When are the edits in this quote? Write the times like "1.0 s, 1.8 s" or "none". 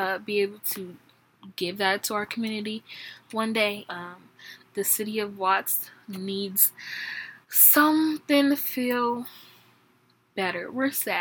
3.9 s, 7.4 s

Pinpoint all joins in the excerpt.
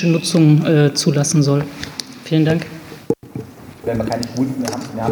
3.8 s

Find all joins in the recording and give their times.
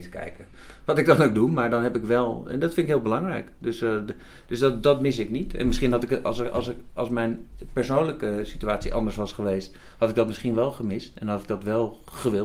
none

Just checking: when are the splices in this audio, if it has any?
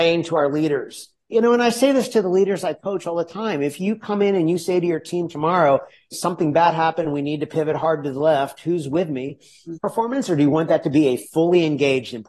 6.1 s, 9.8 s

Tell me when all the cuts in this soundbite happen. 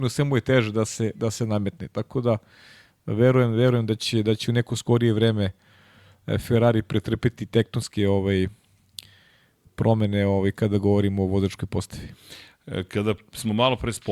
none

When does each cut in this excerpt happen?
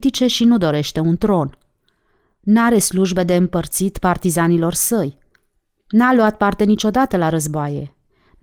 none

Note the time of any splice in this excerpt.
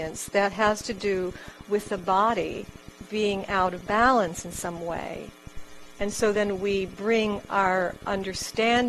none

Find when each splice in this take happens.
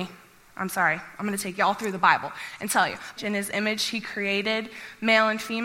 3.2 s

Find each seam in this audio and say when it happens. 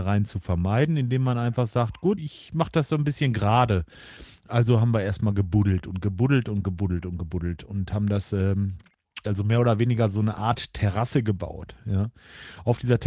2.2 s, 9.2 s

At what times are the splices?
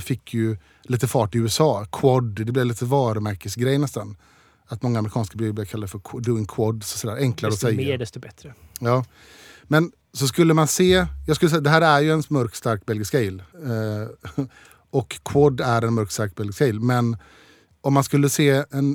13.5 s

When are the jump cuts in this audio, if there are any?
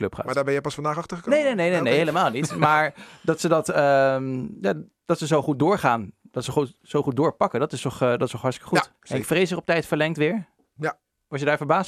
8.9 s

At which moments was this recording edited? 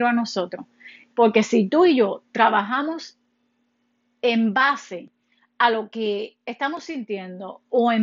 1.1 s

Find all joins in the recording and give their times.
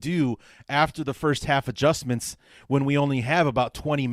none

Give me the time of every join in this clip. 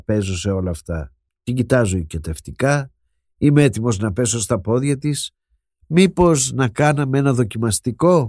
1.3 s

